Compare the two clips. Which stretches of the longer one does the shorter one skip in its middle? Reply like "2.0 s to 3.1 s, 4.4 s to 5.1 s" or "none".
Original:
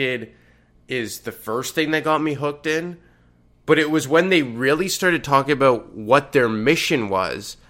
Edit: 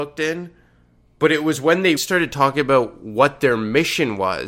4.4 s to 4.9 s

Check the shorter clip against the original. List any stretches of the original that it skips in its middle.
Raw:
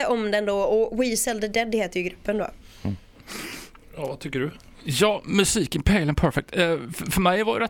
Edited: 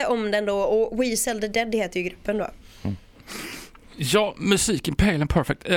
3.8 s to 4.7 s

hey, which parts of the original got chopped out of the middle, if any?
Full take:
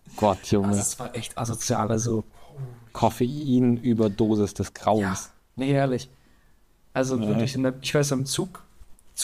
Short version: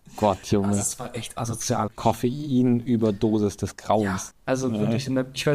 1.9 s to 2.8 s, 5.3 s to 6.8 s

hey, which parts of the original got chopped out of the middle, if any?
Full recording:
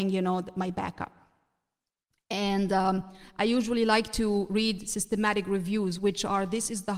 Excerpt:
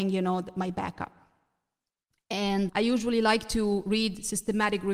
2.7 s to 3.3 s

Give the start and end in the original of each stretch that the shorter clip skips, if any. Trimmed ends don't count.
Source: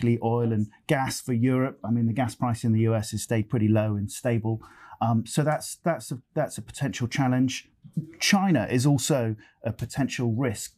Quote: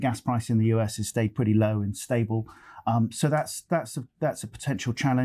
none

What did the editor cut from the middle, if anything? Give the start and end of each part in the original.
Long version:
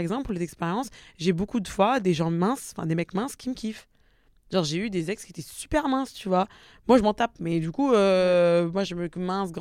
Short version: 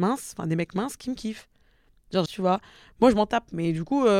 4.6 s to 6.1 s

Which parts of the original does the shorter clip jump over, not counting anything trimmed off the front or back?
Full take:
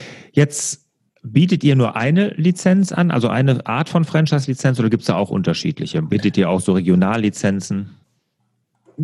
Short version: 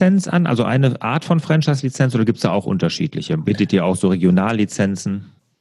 none

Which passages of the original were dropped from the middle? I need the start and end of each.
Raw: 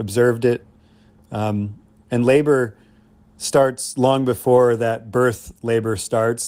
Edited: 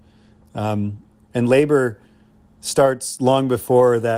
none

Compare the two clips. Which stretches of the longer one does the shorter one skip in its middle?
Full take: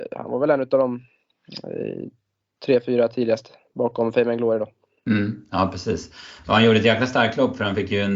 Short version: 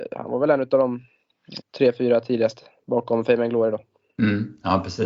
1.6 s to 2.5 s

